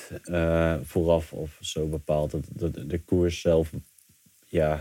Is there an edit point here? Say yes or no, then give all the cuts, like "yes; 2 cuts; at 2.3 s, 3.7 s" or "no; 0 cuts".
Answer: no; 0 cuts